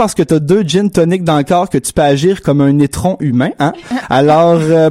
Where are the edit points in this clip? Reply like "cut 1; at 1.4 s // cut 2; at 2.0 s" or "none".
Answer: none